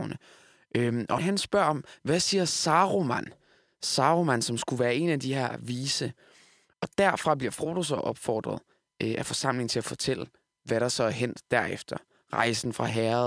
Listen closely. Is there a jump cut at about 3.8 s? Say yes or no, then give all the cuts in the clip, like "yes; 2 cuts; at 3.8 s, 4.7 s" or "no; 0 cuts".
no; 2 cuts; at 1.2 s, 6.7 s